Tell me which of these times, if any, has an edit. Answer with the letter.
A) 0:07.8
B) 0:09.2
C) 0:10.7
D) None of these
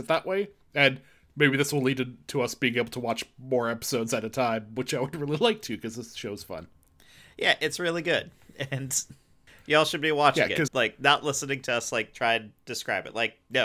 C